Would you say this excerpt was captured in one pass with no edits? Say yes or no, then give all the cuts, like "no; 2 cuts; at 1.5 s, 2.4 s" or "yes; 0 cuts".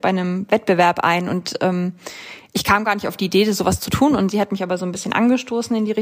yes; 0 cuts